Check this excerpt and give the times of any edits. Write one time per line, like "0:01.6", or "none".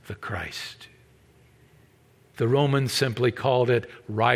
0:02.3